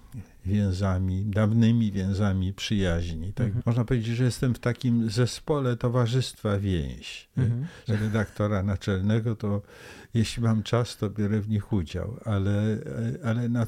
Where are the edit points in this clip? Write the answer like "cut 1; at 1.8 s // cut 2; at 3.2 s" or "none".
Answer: cut 1; at 3.6 s // cut 2; at 7.9 s